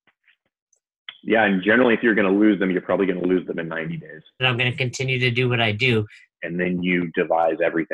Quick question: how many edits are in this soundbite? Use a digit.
2